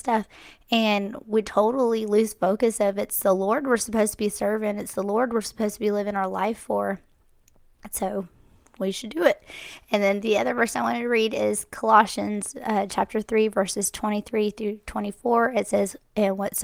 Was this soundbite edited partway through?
no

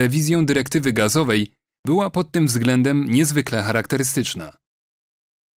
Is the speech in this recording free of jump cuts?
no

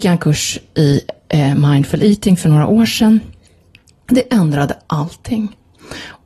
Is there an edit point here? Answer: no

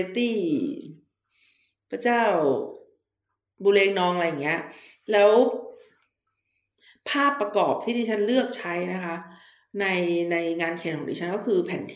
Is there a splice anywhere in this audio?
no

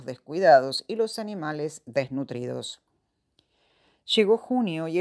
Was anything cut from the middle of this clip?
no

